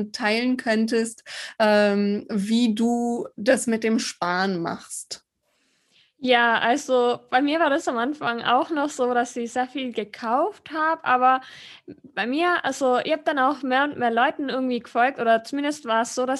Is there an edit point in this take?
no; 0 cuts

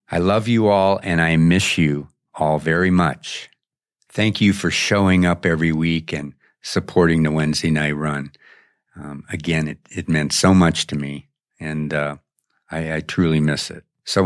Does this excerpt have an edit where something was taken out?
no; 0 cuts

